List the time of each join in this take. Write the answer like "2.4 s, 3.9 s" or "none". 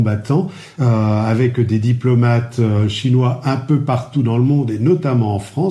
none